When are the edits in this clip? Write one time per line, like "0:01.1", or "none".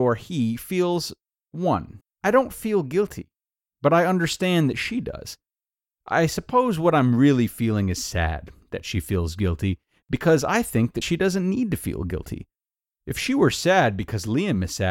0:02.0